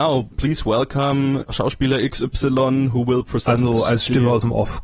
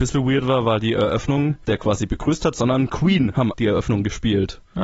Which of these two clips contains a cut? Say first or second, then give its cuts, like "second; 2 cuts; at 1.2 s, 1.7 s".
second; 2 cuts; at 1.6 s, 3.5 s